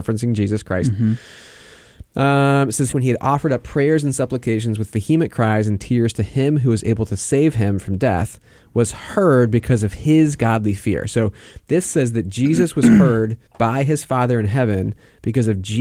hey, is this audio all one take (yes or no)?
no